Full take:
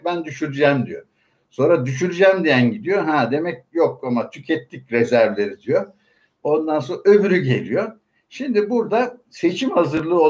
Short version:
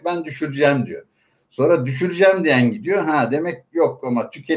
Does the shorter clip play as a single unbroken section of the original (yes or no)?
yes